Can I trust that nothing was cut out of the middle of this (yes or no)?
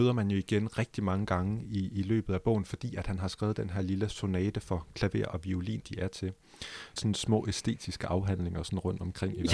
no